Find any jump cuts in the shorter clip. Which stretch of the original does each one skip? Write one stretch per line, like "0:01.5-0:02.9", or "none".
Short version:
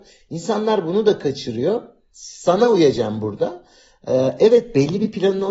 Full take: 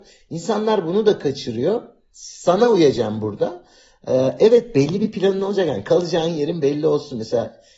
none